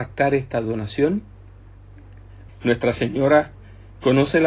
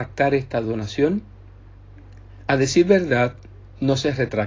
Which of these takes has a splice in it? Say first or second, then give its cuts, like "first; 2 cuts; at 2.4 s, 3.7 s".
first; 1 cut; at 2.5 s